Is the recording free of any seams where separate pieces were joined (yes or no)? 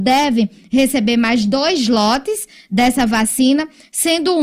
yes